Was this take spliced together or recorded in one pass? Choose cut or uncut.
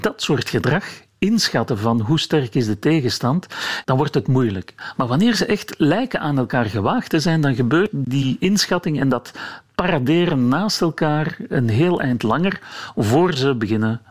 cut